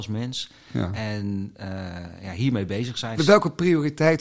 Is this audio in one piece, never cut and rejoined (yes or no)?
no